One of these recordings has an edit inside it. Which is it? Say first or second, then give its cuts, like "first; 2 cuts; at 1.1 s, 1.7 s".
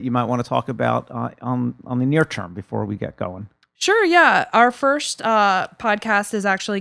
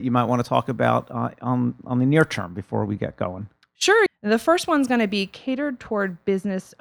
second; 1 cut; at 4.1 s